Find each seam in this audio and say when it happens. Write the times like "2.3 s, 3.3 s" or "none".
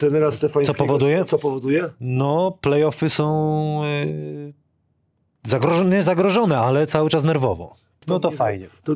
8.0 s